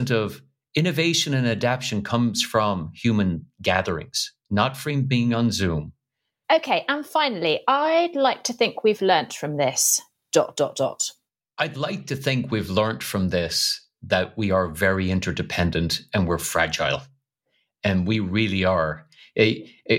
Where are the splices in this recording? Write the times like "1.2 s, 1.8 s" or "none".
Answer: 6.4 s